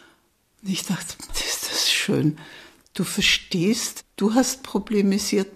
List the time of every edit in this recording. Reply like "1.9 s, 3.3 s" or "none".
1.3 s